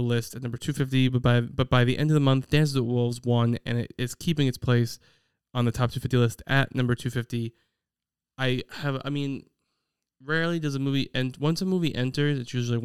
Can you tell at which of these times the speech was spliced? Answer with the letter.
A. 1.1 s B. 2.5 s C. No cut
C